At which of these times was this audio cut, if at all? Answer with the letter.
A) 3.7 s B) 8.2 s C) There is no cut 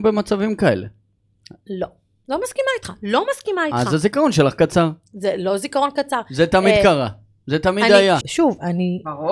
B